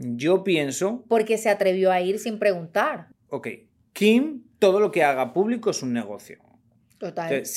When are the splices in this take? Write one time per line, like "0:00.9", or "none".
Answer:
0:03.1